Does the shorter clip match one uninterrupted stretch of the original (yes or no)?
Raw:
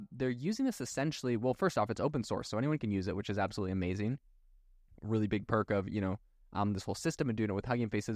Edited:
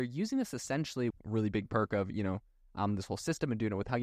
no